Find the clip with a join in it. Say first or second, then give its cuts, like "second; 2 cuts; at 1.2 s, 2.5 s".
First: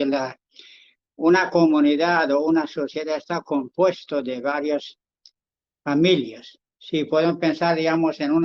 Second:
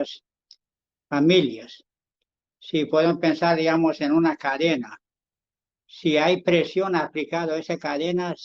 first; 1 cut; at 6.7 s